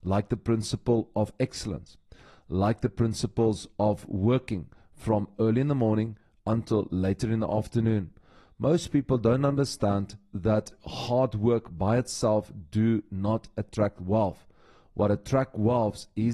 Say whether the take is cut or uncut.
uncut